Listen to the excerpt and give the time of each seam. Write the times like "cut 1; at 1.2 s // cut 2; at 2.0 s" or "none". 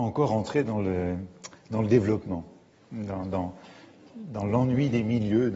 none